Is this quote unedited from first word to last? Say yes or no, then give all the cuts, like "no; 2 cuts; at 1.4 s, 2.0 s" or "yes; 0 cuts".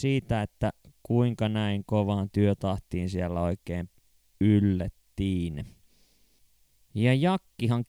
yes; 0 cuts